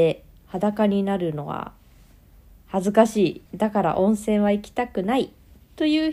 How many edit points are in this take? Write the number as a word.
one